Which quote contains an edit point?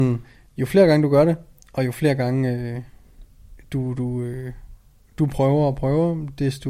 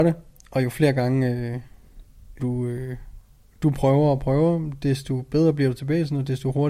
second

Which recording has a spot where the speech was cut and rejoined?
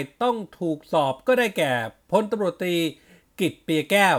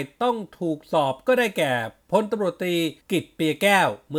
second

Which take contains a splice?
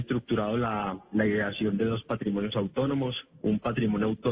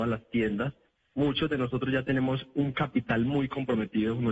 second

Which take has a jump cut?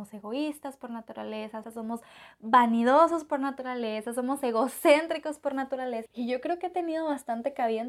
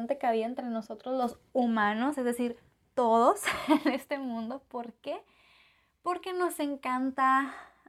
first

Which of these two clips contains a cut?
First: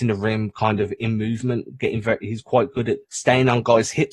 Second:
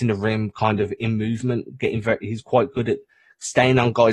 first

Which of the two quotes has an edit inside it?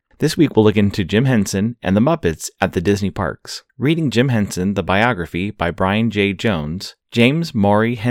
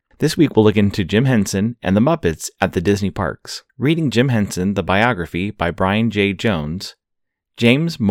first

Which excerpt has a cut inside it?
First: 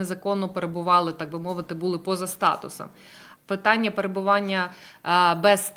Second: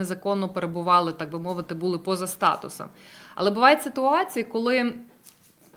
first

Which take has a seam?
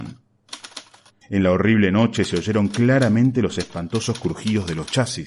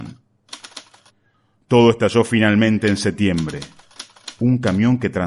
first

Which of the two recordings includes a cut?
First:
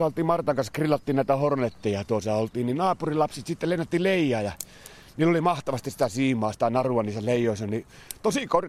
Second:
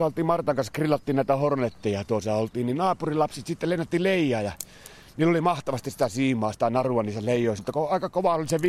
second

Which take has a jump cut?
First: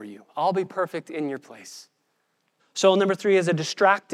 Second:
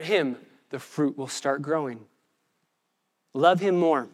first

